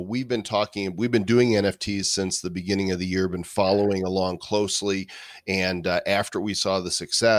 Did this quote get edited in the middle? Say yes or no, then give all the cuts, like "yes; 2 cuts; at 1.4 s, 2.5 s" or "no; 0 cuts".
no; 0 cuts